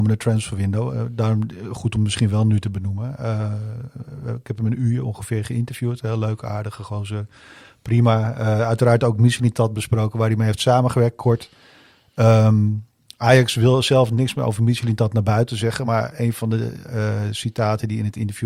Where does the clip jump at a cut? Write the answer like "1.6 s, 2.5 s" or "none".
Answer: none